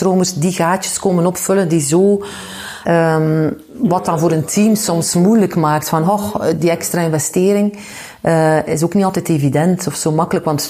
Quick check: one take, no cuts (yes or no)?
no